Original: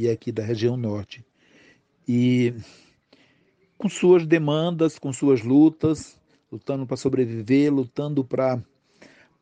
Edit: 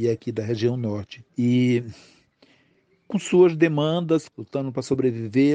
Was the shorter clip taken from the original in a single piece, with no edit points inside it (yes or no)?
no